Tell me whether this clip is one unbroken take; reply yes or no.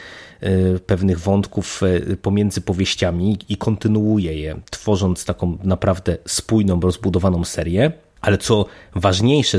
yes